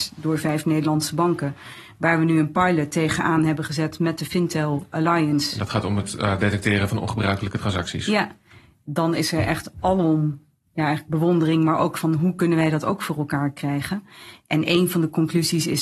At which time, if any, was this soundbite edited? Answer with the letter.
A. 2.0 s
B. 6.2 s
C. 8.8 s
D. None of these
C